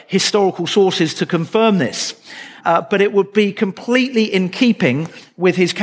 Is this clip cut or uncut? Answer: cut